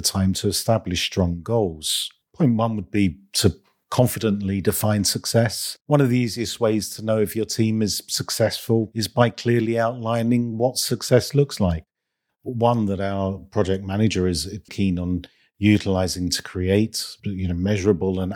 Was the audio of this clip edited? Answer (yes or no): yes